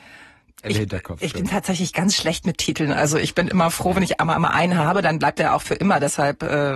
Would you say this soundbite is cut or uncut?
uncut